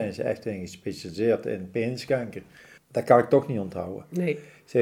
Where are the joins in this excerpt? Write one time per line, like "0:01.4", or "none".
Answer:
0:02.8